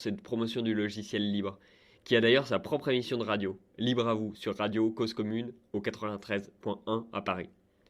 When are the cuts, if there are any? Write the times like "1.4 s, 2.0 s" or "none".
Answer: none